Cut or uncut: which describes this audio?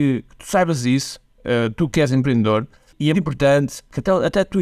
cut